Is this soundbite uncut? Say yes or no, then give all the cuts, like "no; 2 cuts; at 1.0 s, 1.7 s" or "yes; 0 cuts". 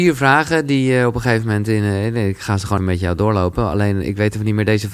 no; 1 cut; at 2.8 s